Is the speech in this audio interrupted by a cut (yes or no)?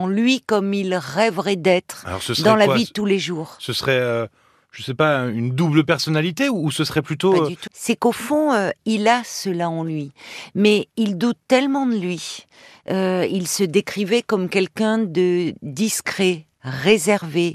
yes